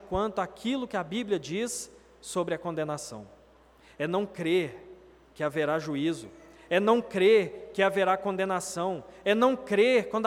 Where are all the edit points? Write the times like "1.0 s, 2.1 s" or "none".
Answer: none